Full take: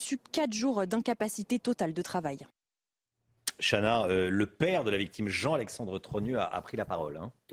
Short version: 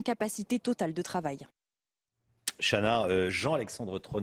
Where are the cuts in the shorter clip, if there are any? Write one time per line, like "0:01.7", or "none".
0:03.3